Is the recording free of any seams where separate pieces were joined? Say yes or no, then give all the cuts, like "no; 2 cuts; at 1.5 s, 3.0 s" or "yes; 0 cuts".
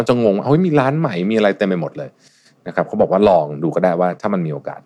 yes; 0 cuts